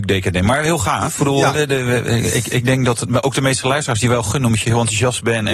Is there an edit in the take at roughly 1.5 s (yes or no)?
no